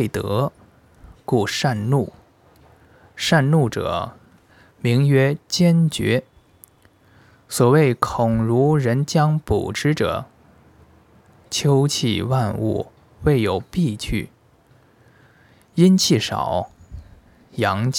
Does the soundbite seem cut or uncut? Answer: uncut